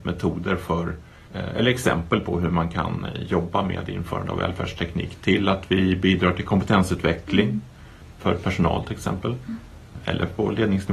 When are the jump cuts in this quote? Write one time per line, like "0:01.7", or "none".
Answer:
none